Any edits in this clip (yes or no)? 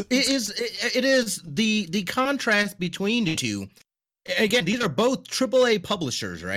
no